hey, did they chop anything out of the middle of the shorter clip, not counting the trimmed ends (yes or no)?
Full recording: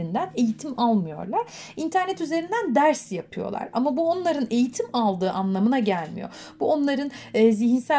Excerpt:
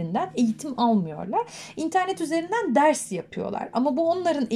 no